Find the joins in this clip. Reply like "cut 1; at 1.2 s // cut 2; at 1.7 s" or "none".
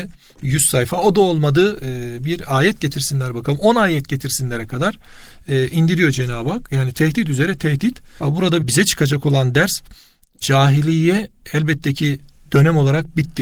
cut 1; at 8.2 s